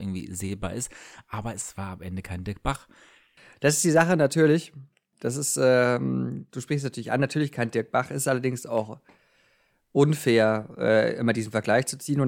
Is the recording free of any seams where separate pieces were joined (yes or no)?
yes